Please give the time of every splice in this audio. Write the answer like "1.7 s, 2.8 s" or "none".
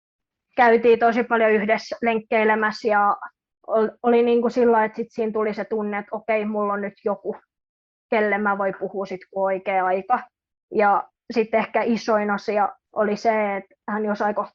12.8 s